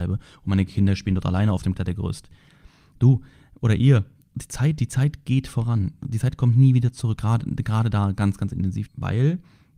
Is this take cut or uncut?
cut